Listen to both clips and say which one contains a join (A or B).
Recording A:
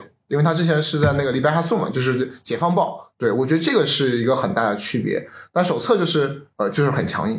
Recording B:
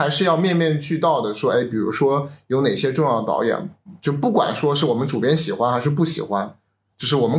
A